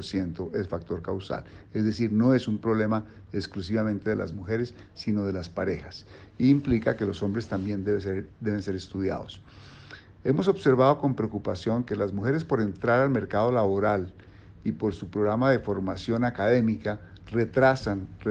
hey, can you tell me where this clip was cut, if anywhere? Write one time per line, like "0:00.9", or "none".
none